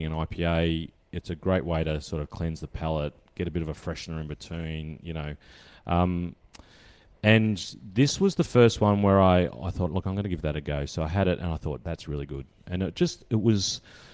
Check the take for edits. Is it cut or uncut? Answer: uncut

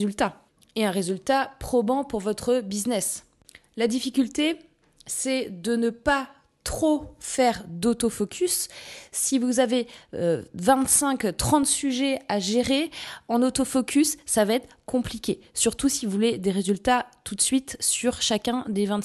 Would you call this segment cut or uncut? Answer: uncut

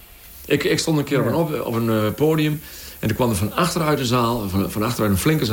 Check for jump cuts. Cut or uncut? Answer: uncut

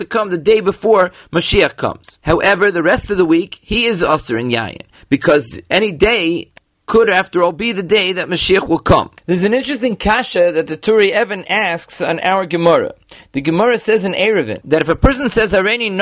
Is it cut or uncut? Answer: cut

